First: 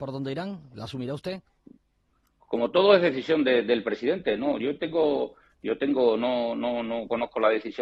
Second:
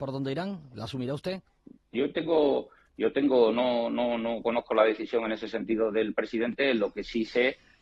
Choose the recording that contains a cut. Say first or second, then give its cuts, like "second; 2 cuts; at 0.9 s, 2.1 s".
second; 1 cut; at 1.9 s